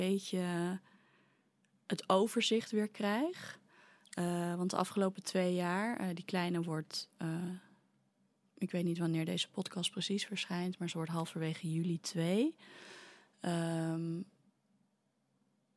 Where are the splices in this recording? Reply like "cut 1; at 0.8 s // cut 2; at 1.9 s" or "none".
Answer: none

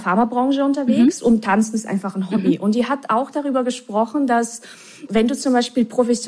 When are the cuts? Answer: cut 1; at 5.1 s

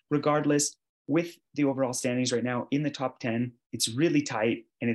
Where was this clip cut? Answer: cut 1; at 3.6 s

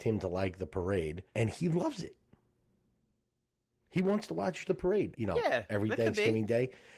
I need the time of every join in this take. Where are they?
cut 1; at 1.3 s // cut 2; at 5.1 s

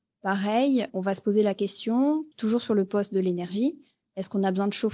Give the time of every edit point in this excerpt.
cut 1; at 0.9 s // cut 2; at 2.3 s

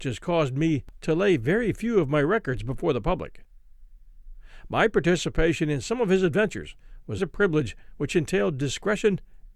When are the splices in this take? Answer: cut 1; at 1.0 s // cut 2; at 7.2 s

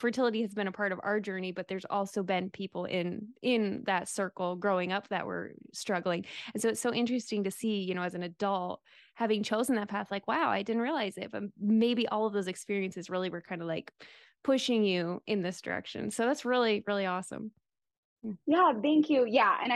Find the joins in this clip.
none

